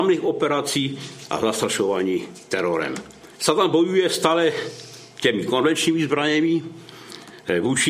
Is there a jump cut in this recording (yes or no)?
yes